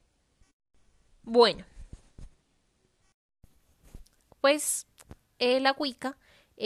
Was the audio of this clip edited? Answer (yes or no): yes